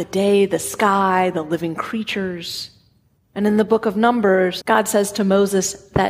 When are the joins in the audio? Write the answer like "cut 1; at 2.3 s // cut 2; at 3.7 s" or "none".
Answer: cut 1; at 4.6 s